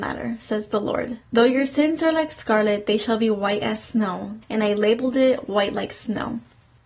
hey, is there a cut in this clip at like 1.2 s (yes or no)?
yes